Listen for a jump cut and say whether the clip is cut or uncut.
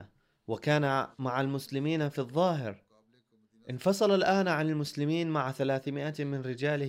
uncut